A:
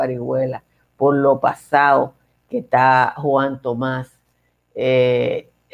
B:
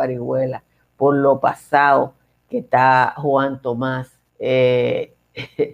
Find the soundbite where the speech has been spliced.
B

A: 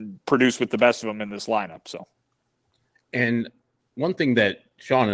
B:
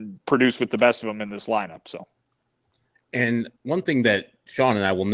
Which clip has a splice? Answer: B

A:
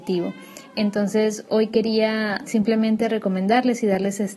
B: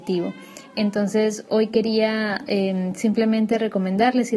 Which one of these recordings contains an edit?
A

